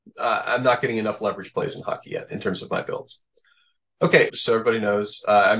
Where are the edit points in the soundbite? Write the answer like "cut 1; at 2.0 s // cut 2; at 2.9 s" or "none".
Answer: cut 1; at 4.3 s